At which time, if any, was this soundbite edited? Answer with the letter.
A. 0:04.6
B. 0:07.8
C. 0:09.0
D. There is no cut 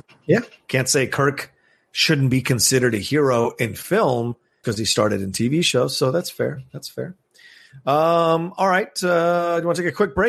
A